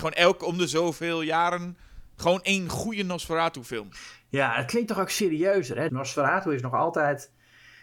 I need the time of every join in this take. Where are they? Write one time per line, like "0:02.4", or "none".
0:05.9